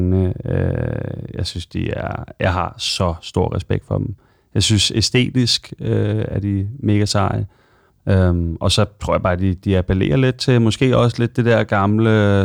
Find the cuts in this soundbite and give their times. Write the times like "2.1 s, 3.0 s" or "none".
7.9 s